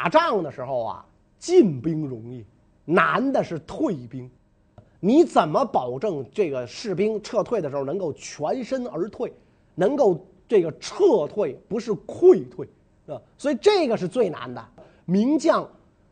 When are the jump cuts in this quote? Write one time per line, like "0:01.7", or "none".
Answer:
none